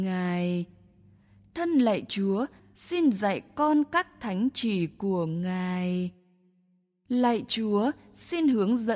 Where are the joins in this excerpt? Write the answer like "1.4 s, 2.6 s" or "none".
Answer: 2.6 s

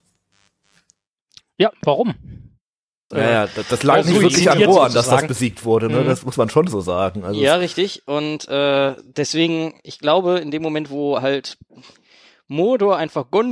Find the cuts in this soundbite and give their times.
3.1 s

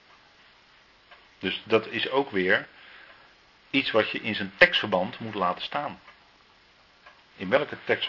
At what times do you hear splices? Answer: none

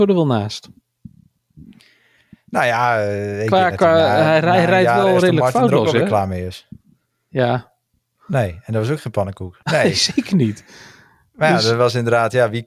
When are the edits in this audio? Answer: 8.2 s, 9.6 s

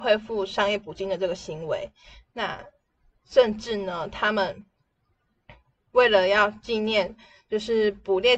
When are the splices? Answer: none

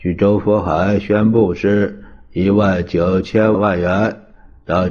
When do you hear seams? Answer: 3.5 s

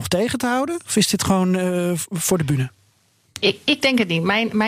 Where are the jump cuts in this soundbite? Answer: none

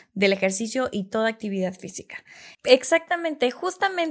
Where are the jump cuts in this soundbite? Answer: 2.5 s

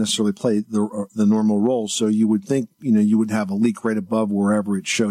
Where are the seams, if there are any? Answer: none

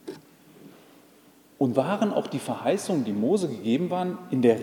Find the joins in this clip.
1.7 s

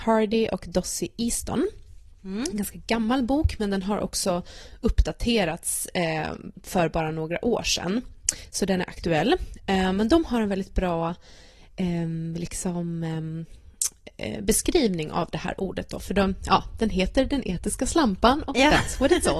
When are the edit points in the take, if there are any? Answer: none

